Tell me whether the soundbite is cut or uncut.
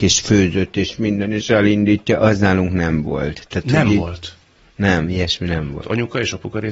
cut